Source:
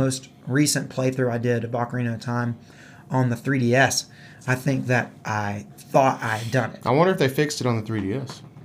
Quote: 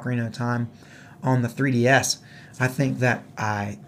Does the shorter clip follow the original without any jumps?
yes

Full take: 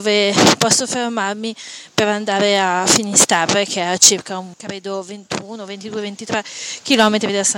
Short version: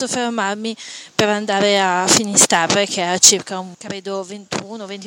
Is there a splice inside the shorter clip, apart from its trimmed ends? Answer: no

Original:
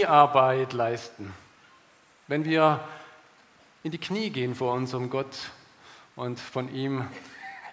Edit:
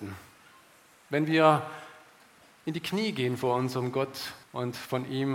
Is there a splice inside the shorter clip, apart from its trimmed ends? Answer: yes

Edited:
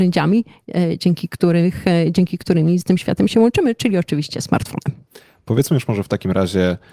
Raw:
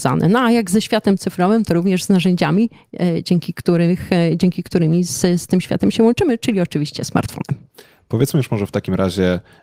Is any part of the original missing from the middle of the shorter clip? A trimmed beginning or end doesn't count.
yes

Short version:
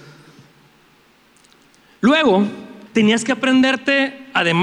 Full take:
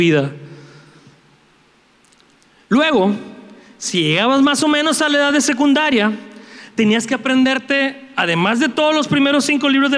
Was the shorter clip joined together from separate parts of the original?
yes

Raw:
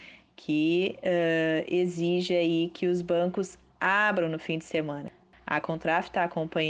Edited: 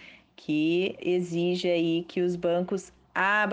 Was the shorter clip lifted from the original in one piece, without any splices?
no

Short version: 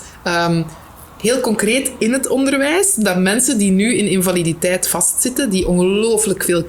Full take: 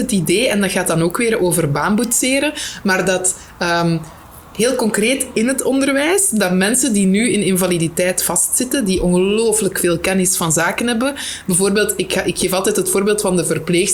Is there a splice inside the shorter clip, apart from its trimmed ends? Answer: no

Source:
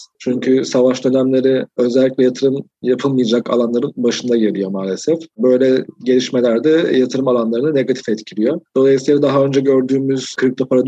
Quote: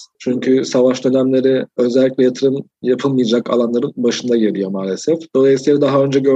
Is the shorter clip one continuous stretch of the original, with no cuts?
no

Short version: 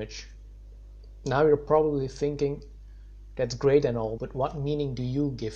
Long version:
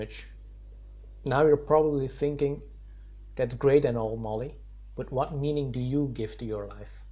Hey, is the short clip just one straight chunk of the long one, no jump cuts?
no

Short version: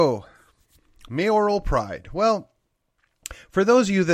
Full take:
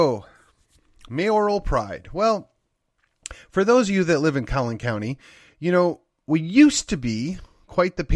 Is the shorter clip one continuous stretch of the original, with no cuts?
yes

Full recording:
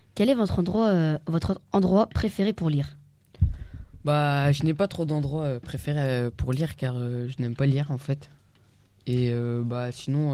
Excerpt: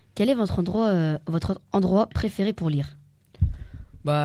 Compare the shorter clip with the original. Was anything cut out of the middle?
no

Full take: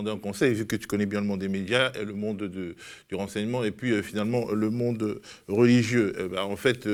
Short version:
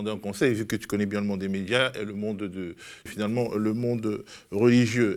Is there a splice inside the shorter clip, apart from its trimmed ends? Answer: yes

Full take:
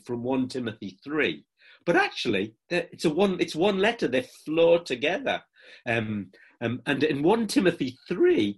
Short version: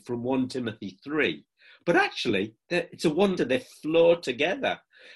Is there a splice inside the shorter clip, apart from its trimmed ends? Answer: yes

